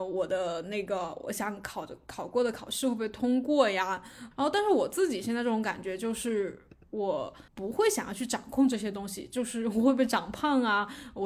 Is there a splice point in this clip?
yes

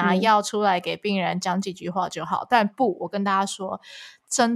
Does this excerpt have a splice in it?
no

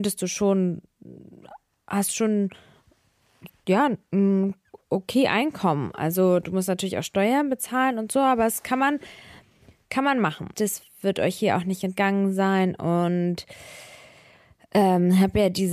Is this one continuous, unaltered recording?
no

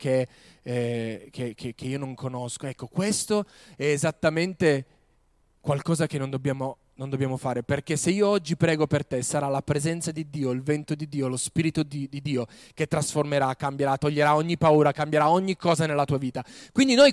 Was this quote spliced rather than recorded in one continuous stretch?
no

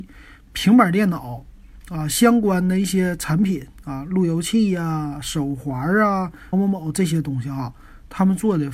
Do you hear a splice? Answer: yes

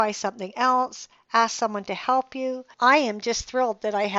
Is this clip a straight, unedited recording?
yes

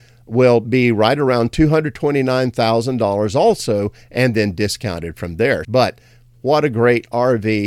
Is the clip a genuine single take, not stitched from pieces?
no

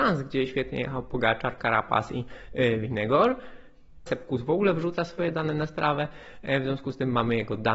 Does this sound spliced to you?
yes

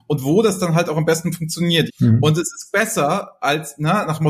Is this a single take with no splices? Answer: no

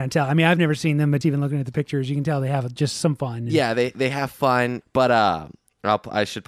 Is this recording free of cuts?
no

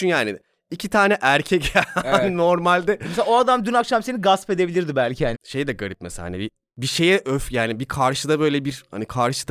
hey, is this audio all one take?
no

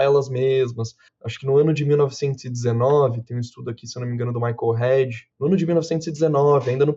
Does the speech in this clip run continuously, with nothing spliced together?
no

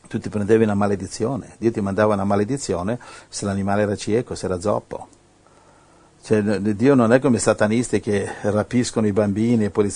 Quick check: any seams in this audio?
no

